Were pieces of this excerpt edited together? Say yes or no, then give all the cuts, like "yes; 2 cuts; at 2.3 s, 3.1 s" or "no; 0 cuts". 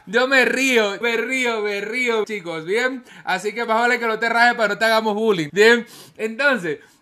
yes; 3 cuts; at 1.0 s, 2.2 s, 5.5 s